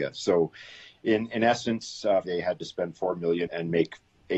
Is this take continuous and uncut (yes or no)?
no